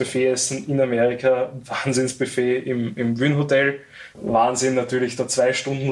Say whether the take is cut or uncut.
cut